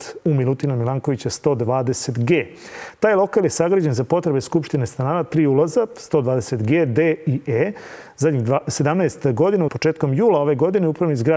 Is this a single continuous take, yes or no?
no